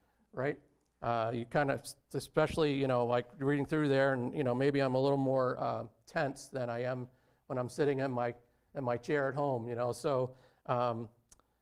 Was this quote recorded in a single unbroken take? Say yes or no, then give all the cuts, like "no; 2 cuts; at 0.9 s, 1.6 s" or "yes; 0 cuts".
yes; 0 cuts